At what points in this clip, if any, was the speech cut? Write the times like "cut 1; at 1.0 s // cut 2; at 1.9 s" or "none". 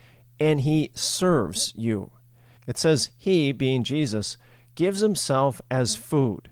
cut 1; at 2.6 s